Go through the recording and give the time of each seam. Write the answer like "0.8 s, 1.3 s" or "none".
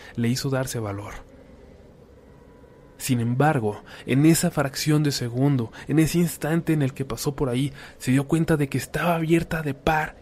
3.0 s